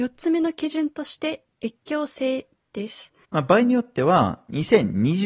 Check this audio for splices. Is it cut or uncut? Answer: cut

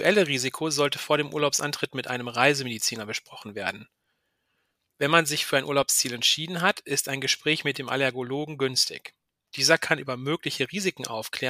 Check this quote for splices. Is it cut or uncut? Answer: uncut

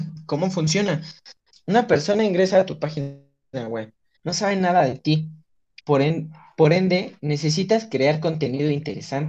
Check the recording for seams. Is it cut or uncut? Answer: cut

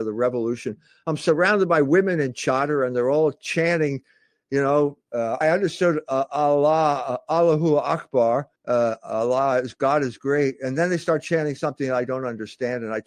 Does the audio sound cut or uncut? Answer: cut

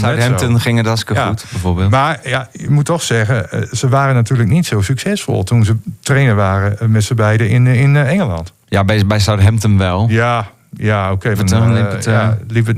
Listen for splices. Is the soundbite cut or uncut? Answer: cut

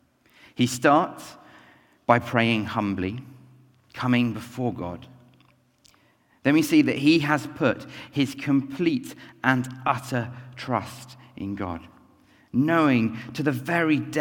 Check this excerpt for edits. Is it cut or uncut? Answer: uncut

